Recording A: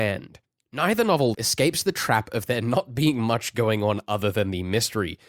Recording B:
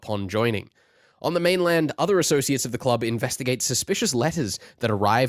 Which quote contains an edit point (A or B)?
A